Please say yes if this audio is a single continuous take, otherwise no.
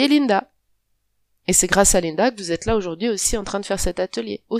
yes